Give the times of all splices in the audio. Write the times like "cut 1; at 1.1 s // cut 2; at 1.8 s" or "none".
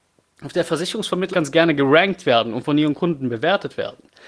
cut 1; at 1.3 s